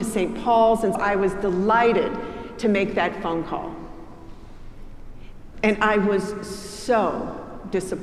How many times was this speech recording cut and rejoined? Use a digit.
2